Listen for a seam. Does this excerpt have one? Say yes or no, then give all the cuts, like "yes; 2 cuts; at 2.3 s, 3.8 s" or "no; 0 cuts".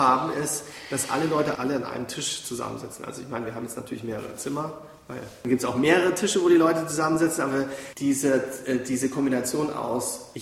yes; 1 cut; at 1.6 s